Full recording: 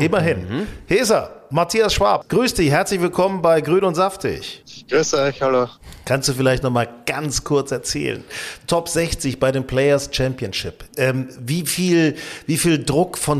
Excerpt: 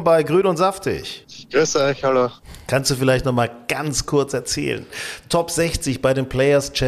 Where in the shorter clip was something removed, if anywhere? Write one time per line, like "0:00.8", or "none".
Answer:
none